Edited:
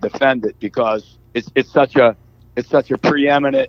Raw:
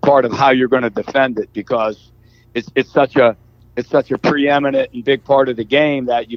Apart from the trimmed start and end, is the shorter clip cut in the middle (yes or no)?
yes